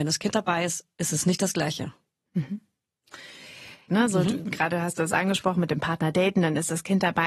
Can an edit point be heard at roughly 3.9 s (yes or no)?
yes